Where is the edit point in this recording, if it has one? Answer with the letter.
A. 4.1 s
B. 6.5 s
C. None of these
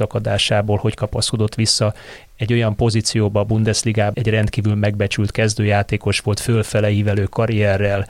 A